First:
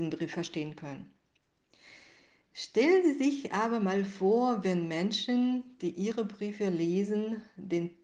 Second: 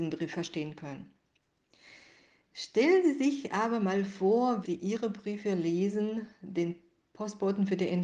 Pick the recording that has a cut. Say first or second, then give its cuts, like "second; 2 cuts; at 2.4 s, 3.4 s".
second; 1 cut; at 4.6 s